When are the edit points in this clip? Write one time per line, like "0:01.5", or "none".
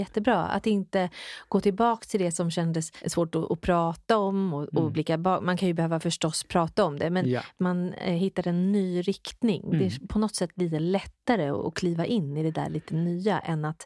none